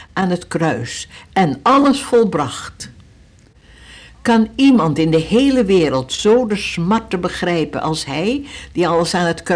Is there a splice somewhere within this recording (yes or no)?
no